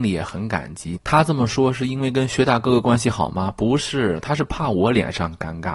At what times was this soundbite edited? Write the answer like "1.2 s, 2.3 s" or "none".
1.0 s